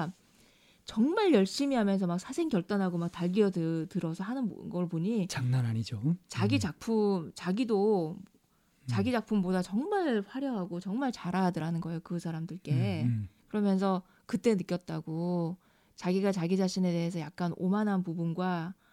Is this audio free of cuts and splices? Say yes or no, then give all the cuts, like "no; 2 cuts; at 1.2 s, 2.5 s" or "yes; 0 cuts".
no; 1 cut; at 13.4 s